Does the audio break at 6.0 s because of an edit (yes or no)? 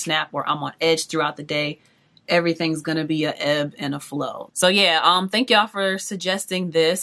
no